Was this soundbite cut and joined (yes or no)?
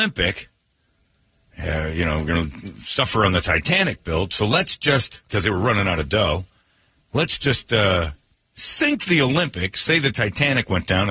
no